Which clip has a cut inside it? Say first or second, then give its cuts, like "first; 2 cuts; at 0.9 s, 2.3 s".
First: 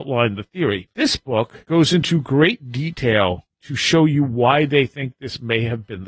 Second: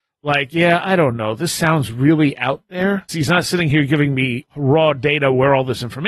second; 1 cut; at 3.1 s